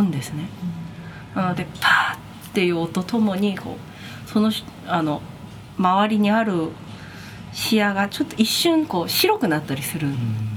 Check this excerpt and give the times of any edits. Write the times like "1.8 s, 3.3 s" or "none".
3.0 s